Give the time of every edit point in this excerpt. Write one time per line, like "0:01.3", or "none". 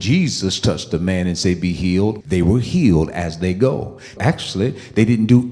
0:02.2
0:04.2